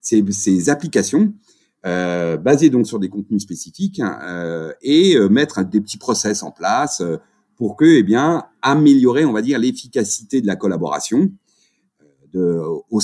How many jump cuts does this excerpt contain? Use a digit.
0